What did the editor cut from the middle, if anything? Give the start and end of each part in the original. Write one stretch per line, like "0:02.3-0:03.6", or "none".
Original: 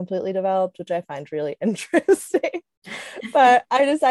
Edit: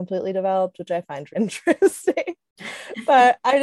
0:01.3-0:01.6